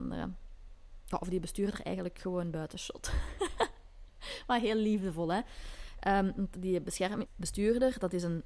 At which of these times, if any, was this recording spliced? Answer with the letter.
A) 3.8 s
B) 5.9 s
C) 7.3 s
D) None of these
C